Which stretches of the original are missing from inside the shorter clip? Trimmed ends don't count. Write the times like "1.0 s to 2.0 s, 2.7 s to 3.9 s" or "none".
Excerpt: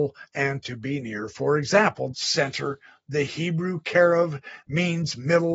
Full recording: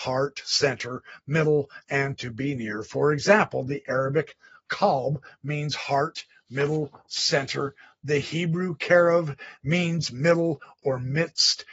3.6 s to 7.1 s